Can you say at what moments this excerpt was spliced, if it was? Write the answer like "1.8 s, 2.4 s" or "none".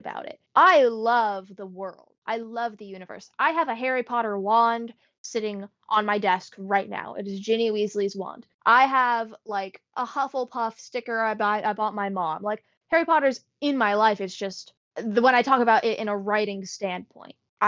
none